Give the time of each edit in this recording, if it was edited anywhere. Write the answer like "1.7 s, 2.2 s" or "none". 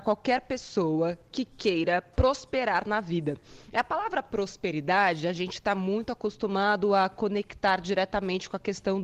none